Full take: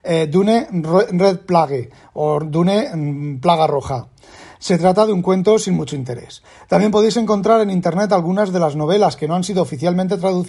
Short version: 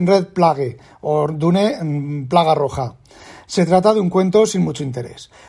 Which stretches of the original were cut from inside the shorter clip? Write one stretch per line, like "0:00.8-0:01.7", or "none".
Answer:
none